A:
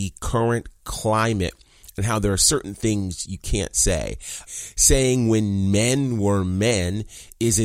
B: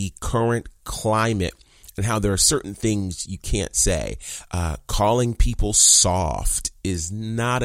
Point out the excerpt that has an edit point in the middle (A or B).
A